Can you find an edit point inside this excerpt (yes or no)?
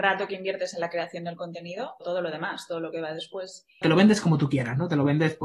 yes